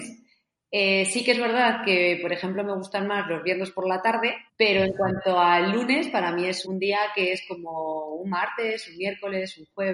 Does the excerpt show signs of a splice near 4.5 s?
yes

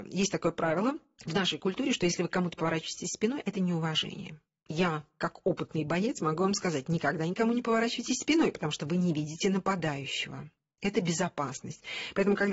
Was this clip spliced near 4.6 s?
no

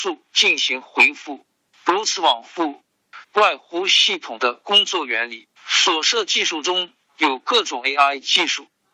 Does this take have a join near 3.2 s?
yes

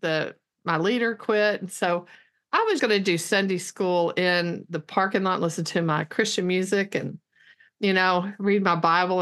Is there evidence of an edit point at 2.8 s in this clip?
yes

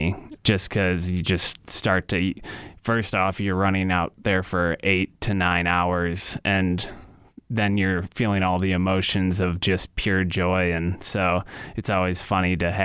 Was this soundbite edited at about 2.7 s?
no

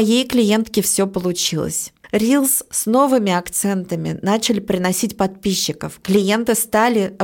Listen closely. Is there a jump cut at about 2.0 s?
no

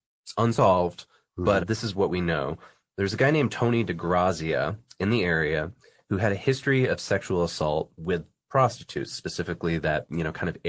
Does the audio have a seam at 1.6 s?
yes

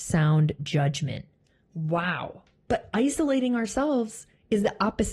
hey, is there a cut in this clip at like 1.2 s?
no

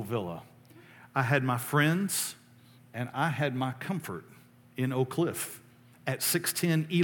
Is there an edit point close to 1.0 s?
no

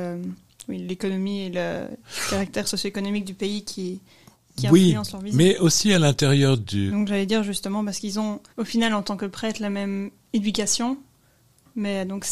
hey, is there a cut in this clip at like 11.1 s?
no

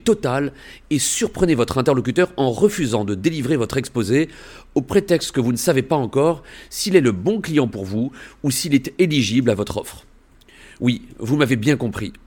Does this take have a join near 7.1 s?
no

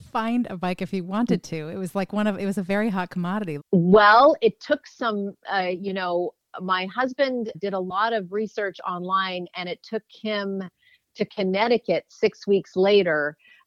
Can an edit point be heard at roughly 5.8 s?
no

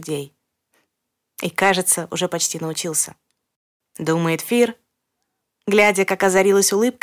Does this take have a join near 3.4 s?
no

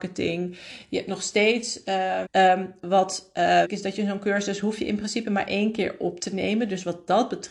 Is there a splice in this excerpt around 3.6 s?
yes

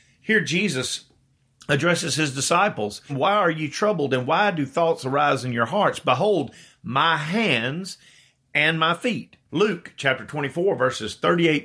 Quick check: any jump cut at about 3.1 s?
yes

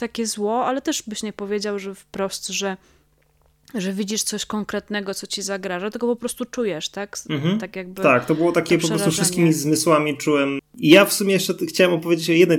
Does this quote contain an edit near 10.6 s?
yes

